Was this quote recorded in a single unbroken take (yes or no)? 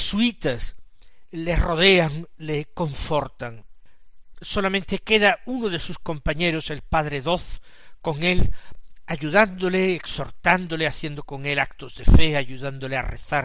no